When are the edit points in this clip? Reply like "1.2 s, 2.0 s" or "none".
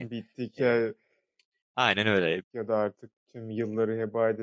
2.4 s